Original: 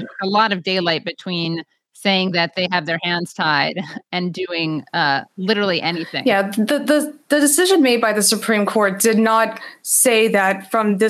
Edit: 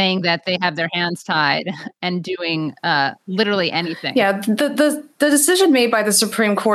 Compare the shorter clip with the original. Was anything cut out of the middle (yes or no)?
no